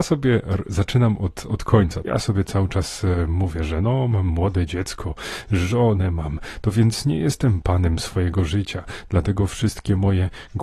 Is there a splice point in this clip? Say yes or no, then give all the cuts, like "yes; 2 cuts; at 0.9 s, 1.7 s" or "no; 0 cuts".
yes; 1 cut; at 2.0 s